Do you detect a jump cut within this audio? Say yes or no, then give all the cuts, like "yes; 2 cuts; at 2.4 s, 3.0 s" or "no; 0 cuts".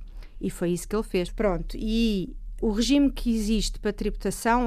yes; 2 cuts; at 1.3 s, 2.6 s